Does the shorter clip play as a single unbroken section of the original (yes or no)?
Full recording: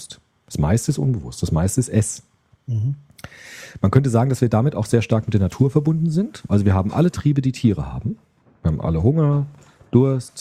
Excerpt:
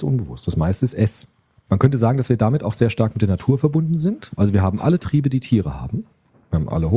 no